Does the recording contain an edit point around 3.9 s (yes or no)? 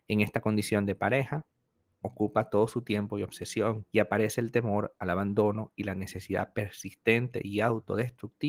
yes